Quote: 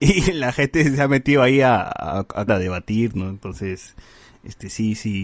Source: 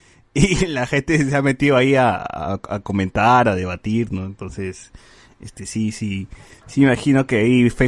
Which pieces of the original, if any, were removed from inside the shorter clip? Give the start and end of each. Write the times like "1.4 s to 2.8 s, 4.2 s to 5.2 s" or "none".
2.8 s to 3.4 s